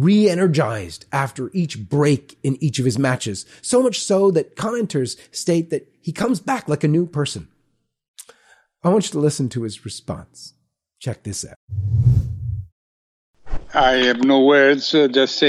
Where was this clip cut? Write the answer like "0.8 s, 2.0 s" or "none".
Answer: none

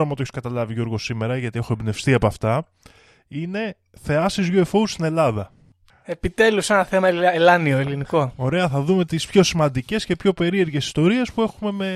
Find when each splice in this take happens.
5.9 s

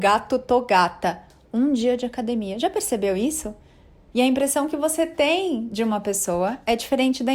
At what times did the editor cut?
4.1 s

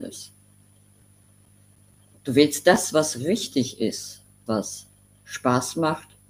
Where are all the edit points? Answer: 2.1 s, 4.5 s

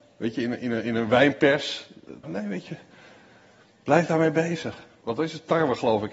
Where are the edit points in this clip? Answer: 2.2 s, 5.0 s

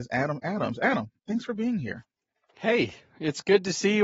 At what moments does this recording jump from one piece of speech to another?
none

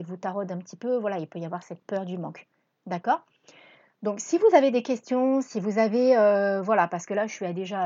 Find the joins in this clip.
none

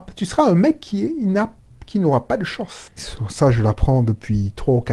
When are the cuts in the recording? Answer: 3.0 s

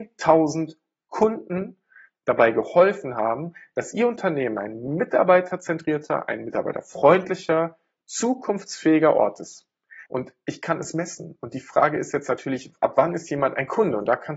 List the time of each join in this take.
10.1 s

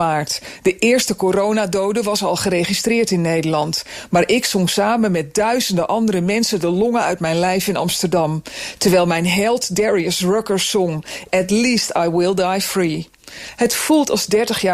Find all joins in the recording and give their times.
11.3 s

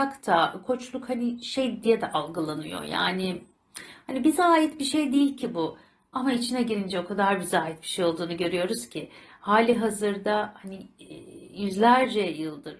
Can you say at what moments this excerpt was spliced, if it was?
none

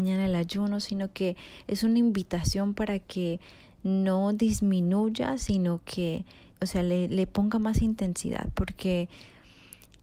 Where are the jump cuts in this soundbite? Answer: 6.5 s

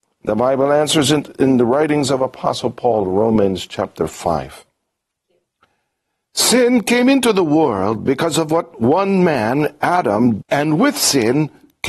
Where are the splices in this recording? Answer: 10.4 s

